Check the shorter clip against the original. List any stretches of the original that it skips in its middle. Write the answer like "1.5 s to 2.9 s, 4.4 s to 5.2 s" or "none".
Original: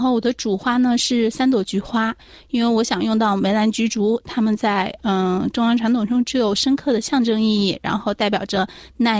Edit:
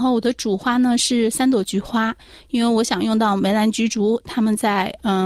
none